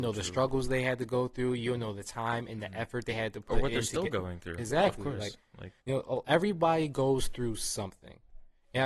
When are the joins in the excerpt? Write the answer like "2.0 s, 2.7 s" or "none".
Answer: 5.8 s